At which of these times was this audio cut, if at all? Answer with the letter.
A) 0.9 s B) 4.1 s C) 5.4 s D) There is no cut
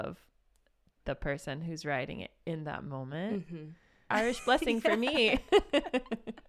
B